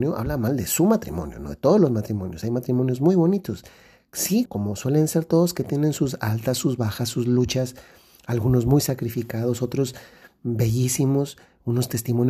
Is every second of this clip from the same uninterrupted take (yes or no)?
no